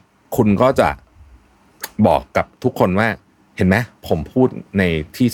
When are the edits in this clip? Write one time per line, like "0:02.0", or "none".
none